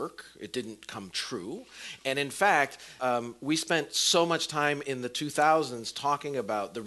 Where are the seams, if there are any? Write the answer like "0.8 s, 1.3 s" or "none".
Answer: 3.0 s